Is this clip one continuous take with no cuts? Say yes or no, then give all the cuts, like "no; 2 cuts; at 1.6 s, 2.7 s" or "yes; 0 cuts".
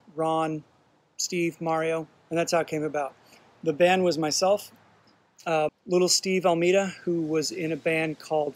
no; 2 cuts; at 2.2 s, 5.7 s